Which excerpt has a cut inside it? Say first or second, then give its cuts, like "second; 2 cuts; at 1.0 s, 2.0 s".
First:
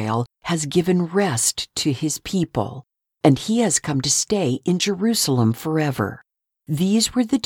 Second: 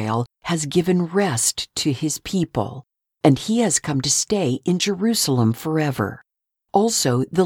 first; 1 cut; at 6.5 s